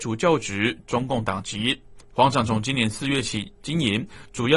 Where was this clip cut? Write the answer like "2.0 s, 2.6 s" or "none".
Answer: 2.1 s